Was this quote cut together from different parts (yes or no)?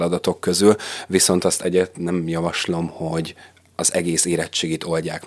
no